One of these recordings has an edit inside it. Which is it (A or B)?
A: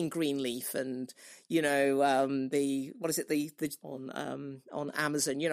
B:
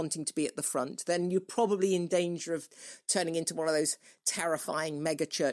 A